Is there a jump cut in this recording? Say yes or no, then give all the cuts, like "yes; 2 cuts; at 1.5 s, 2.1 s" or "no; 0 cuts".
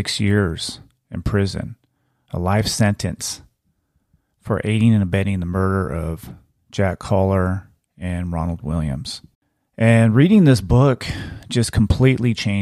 no; 0 cuts